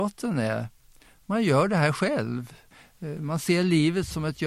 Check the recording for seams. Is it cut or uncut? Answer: uncut